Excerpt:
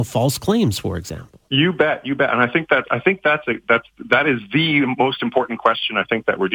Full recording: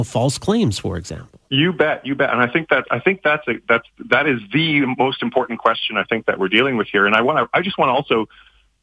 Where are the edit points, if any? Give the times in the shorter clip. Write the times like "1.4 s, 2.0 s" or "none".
none